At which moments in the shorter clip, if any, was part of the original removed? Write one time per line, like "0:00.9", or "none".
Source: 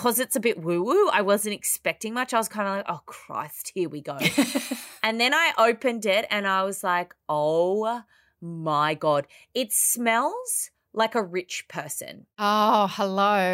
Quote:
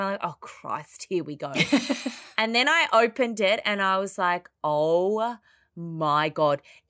none